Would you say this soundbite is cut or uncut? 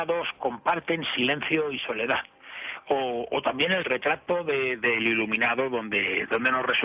uncut